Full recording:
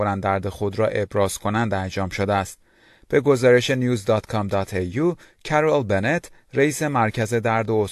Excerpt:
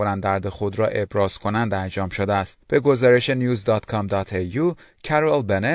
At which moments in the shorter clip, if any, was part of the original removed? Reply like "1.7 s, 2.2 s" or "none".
2.6 s